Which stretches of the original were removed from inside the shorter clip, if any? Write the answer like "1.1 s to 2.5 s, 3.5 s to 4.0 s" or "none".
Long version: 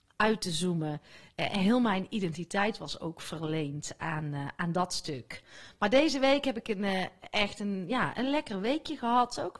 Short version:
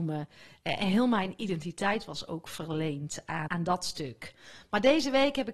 4.2 s to 4.6 s